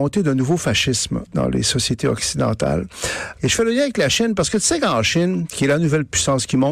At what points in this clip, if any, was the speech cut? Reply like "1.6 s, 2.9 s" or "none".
1.3 s, 3.4 s